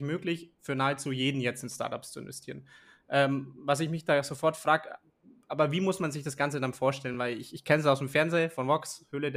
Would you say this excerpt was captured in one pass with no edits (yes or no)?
yes